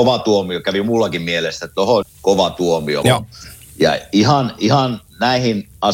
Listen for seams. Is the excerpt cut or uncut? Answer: cut